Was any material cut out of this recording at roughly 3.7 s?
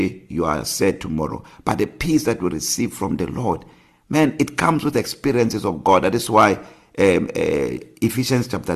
no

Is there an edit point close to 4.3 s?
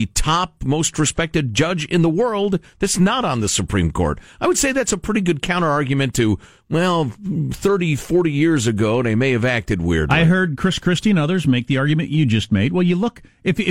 no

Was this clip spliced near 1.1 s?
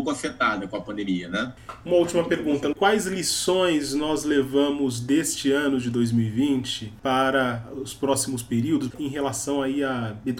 no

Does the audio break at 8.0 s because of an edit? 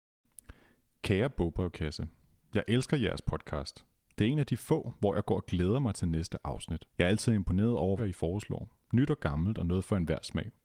yes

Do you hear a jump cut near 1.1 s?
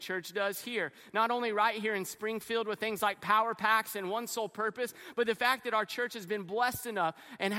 no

